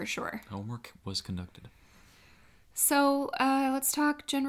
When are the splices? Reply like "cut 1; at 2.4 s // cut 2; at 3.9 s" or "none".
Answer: none